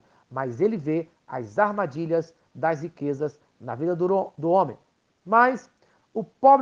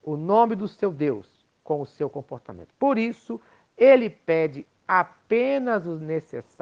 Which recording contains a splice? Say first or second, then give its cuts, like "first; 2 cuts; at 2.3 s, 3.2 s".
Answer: first; 1 cut; at 5.2 s